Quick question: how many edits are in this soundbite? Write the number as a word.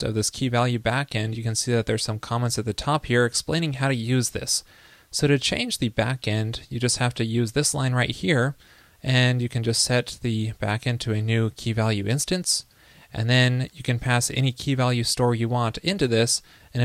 zero